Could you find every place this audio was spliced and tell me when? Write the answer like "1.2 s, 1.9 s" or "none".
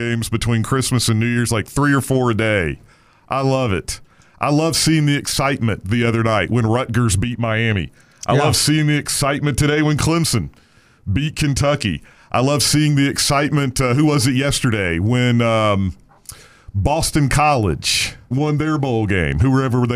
18.3 s